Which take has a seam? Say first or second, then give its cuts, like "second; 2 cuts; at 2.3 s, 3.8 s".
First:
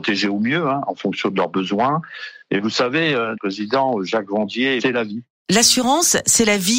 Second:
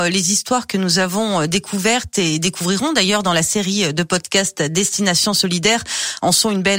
first; 2 cuts; at 3.3 s, 4.8 s